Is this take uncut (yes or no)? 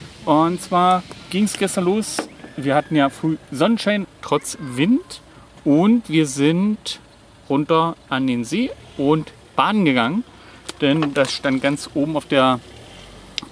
no